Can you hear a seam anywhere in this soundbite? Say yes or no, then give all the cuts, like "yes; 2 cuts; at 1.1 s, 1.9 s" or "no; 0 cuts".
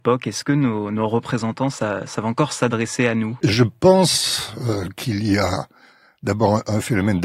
no; 0 cuts